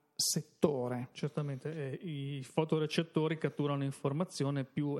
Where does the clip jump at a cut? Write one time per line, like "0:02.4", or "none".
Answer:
0:01.1